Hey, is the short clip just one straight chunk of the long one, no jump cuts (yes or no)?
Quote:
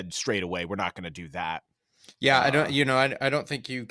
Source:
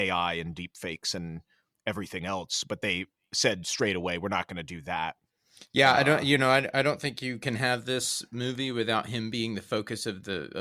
yes